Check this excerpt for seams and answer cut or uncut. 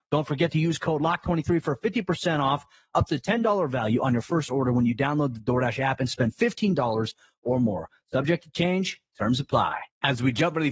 uncut